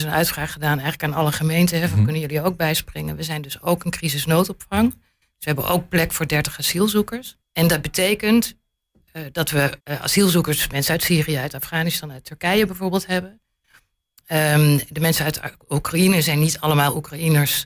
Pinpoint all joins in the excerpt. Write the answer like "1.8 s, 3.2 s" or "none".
7.4 s, 9.8 s